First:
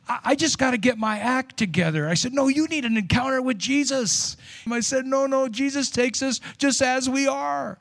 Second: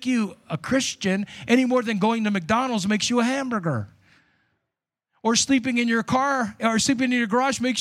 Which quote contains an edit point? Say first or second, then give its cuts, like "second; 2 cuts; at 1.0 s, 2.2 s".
first; 1 cut; at 4.7 s